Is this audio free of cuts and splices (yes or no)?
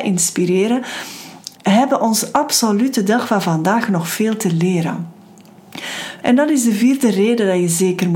no